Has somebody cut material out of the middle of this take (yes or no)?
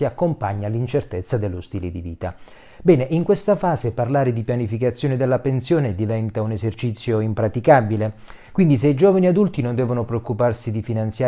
no